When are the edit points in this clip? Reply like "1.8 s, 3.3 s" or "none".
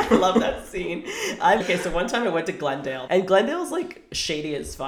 1.6 s, 3.1 s